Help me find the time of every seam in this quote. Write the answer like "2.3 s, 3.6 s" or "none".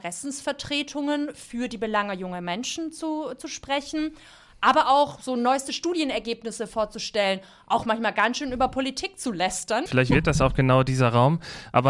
9.9 s